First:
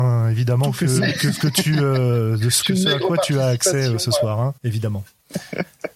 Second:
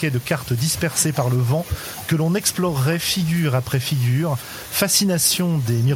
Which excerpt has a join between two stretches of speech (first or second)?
first